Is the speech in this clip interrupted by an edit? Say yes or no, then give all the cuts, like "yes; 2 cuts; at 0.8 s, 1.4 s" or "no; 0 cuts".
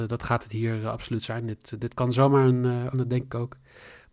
yes; 1 cut; at 2.9 s